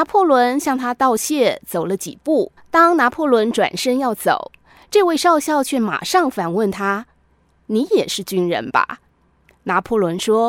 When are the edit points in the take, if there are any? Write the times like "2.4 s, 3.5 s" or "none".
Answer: 2.6 s, 9.1 s